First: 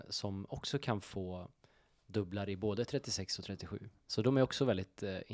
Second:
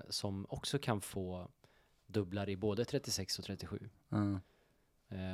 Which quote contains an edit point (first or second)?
first